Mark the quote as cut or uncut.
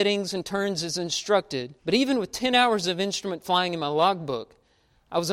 cut